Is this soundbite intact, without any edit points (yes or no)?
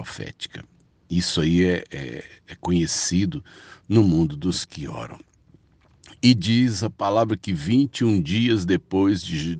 yes